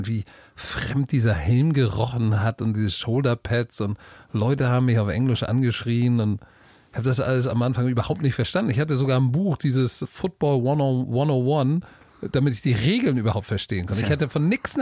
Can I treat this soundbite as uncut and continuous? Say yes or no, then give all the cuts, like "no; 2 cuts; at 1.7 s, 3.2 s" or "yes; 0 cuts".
yes; 0 cuts